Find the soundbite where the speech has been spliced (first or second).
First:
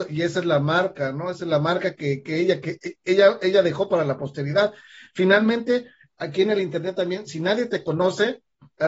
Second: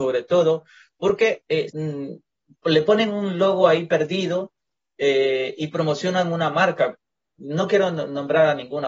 second